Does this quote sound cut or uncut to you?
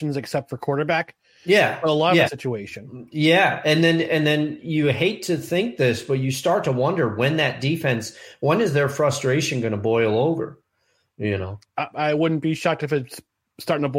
cut